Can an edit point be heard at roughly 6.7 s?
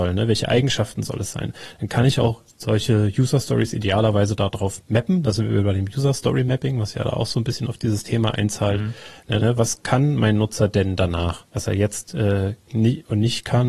no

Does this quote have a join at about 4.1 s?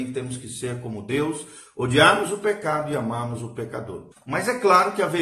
yes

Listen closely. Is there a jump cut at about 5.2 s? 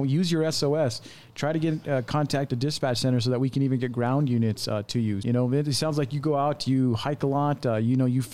yes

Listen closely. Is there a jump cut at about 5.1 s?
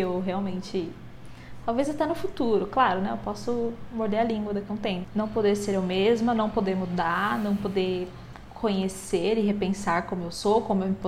yes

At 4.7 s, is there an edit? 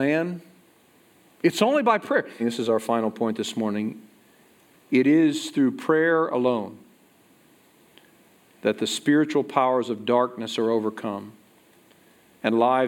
no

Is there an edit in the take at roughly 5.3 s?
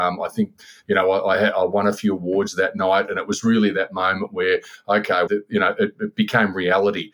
yes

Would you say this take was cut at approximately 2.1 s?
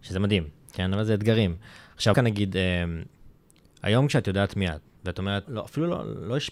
yes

